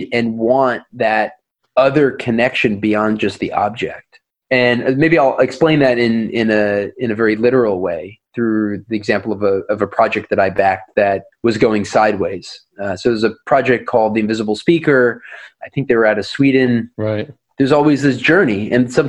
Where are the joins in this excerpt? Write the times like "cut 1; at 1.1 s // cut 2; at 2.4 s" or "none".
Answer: cut 1; at 16.9 s